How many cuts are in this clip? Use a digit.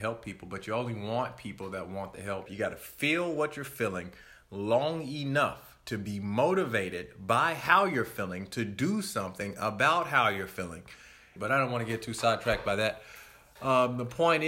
2